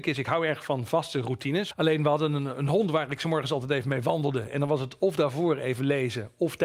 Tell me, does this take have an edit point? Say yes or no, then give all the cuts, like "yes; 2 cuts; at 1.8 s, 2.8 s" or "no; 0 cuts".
no; 0 cuts